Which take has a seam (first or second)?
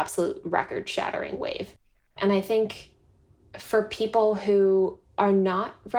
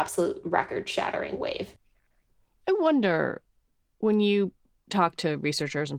first